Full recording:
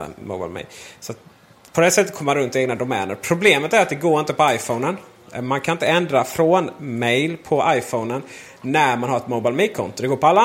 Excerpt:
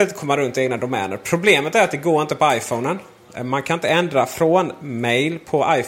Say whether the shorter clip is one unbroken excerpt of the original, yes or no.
yes